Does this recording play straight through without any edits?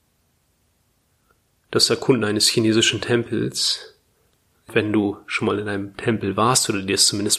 yes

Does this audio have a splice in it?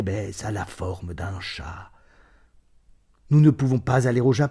no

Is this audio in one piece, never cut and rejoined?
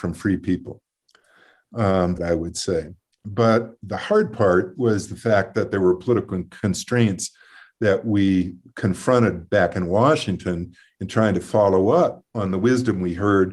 no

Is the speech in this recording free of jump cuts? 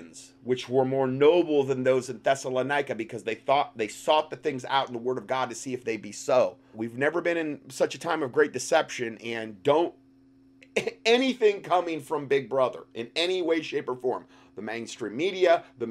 no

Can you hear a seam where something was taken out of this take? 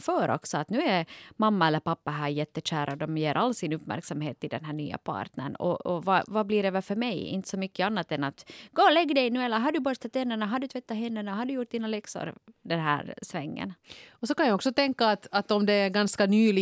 no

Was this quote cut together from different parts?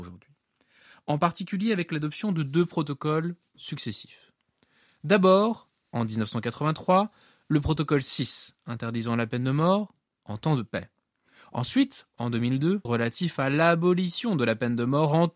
yes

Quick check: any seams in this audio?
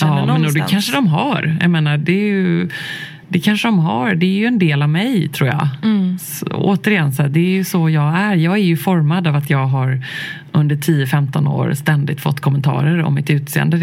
no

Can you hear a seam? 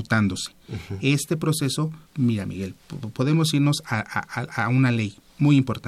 yes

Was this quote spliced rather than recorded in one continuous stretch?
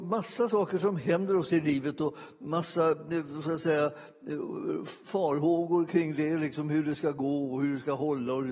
no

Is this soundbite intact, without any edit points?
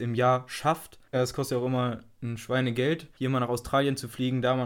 no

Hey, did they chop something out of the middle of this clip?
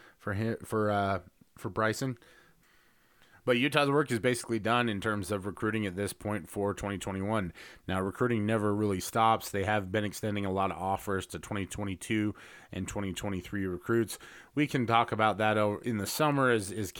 no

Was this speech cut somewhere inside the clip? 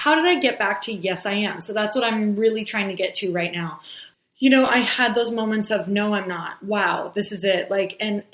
no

